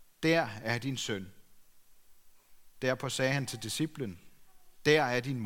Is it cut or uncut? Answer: uncut